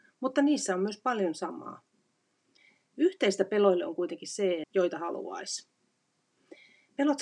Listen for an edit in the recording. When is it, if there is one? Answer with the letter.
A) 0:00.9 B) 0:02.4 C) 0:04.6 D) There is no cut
C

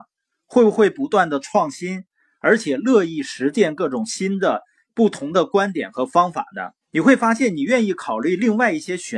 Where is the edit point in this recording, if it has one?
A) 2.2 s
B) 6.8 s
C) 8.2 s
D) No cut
B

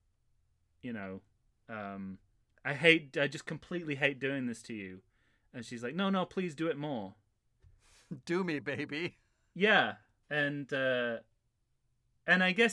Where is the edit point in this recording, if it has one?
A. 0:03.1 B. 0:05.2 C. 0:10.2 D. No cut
C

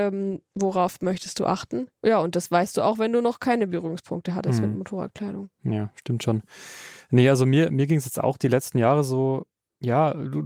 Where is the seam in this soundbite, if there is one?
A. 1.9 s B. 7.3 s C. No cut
A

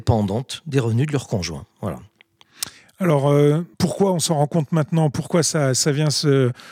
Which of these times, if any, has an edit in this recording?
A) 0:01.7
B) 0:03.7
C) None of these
B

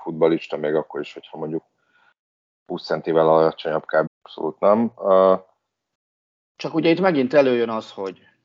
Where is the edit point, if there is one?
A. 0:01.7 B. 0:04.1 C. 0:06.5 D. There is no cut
B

